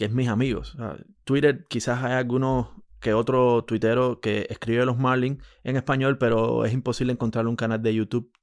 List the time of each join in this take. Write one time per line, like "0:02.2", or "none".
0:01.2